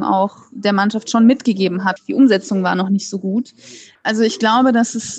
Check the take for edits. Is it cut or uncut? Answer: cut